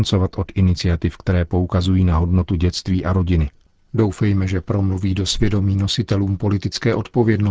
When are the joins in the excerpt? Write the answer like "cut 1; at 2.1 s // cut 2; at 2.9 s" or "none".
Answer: none